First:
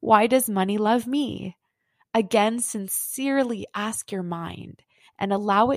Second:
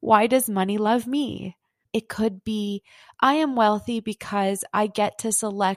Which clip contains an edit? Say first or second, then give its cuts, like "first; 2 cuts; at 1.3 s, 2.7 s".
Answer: second; 1 cut; at 1.8 s